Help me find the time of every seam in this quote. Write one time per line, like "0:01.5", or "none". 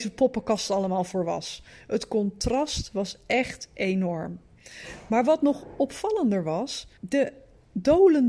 0:07.0